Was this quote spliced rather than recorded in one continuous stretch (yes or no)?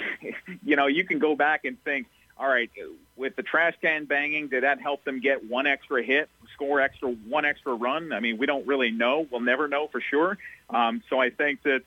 no